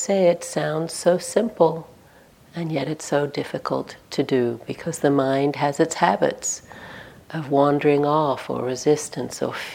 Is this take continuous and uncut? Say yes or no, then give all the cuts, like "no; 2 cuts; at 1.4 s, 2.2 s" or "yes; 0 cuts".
yes; 0 cuts